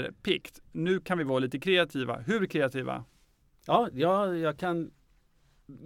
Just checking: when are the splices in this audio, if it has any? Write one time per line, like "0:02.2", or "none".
none